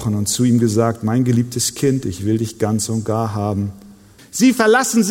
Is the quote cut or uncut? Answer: cut